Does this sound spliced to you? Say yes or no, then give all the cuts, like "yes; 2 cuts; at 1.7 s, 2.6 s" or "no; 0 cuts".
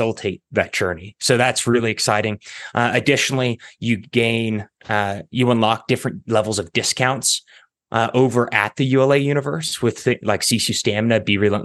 no; 0 cuts